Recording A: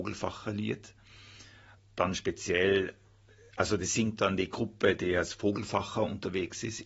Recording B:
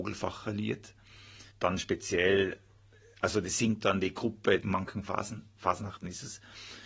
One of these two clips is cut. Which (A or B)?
B